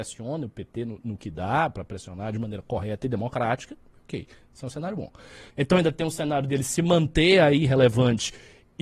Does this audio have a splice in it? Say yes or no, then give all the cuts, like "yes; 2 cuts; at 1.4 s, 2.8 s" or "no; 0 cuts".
yes; 1 cut; at 5.5 s